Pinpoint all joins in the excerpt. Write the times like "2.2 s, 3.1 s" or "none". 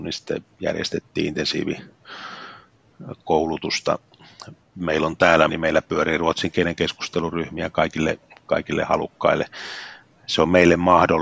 5.5 s